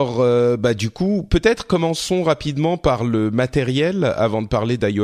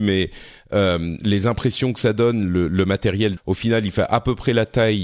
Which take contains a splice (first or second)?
second